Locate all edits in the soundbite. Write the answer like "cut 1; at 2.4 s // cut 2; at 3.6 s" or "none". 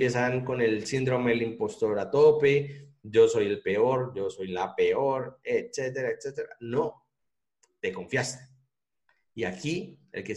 none